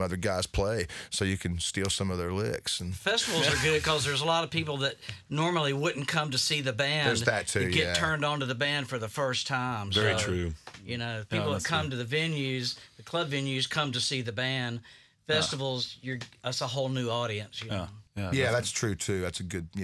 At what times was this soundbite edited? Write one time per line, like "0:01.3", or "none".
none